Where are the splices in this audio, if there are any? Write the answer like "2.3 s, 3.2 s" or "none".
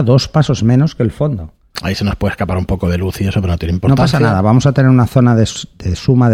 1.7 s